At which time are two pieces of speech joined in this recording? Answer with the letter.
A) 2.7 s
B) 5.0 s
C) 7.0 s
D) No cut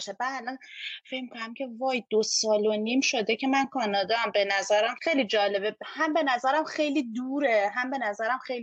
B